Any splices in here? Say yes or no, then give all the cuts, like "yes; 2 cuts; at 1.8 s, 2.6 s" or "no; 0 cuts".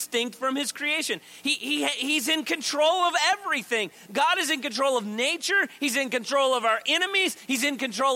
no; 0 cuts